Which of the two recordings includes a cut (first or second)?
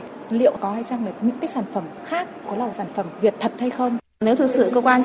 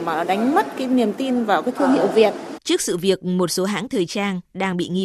second